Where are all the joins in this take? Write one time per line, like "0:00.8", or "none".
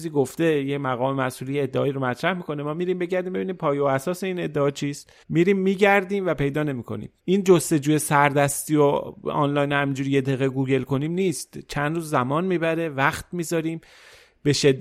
0:05.2
0:07.2